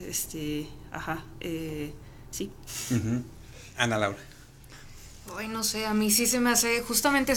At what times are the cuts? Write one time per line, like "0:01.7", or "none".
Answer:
none